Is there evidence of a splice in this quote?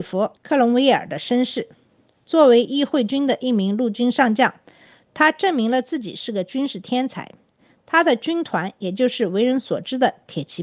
no; 0 cuts

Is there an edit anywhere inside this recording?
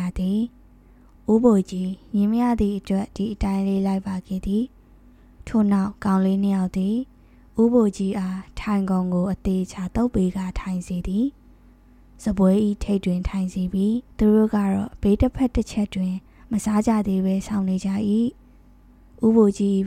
yes; 1 cut; at 14.1 s

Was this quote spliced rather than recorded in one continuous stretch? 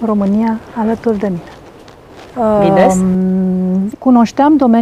yes; 2 cuts; at 2.3 s, 3.9 s

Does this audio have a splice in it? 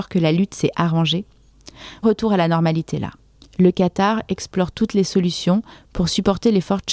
yes; 2 cuts; at 2.0 s, 3.4 s

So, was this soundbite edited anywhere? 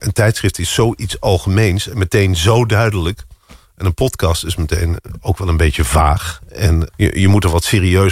no; 0 cuts

